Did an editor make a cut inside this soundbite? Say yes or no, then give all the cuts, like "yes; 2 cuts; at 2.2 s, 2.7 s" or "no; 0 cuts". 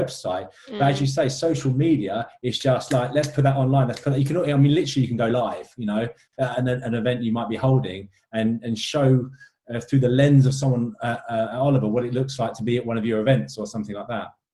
no; 0 cuts